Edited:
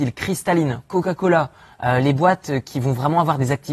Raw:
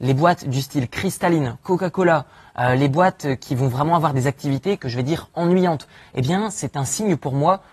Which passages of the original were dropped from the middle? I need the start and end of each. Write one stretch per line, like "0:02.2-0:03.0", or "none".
none

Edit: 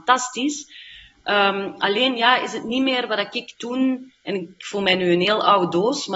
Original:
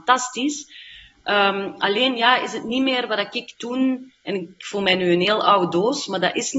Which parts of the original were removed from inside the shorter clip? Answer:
none

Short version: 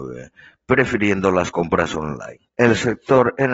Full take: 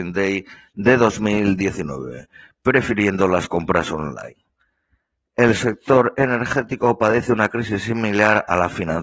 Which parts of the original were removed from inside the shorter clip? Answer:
0:04.4-0:05.3

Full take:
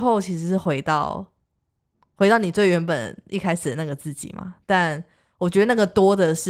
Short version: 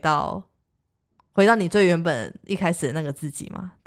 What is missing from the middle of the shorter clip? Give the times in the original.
none

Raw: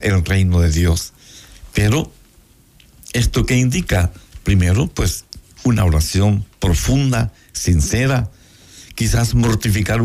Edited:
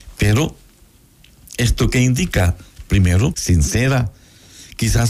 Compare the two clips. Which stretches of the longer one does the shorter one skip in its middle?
0:04.9-0:07.5

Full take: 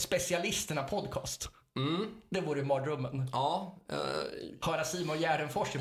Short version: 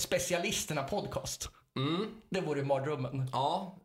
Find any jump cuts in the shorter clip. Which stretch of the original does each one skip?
none

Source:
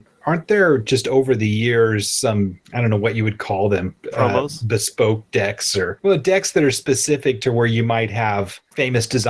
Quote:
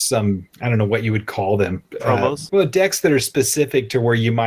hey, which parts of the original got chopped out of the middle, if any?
0:04.6-0:06.0

